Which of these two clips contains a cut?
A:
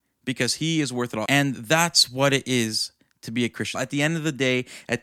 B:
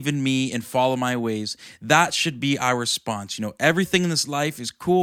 A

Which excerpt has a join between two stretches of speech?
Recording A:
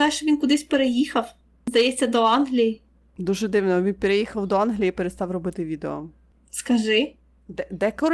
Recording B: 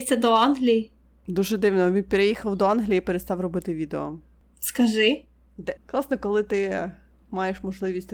B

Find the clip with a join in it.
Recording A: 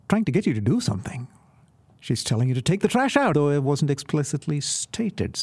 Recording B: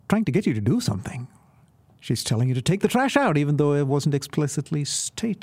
A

